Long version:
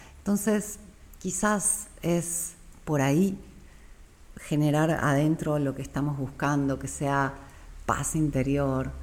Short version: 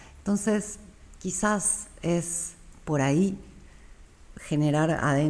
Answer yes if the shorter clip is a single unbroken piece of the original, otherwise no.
yes